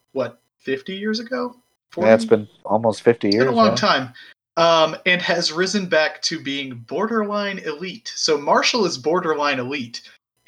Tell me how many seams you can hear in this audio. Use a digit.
0